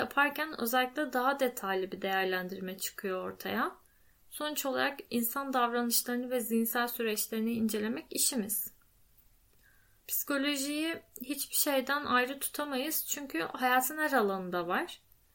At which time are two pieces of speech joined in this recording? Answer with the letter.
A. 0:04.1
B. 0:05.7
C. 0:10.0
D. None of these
C